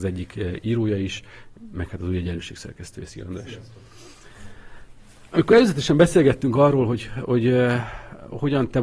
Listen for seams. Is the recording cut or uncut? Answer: uncut